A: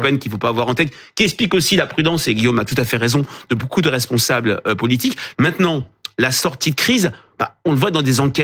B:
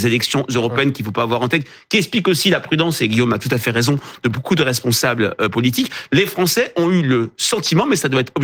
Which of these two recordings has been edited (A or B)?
A